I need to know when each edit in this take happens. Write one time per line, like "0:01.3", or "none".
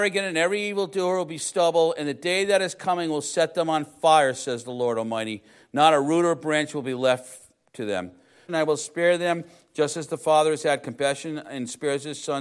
0:08.5